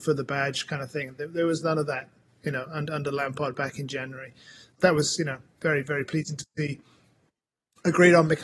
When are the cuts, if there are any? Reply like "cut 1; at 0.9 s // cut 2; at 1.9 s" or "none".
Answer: cut 1; at 4.8 s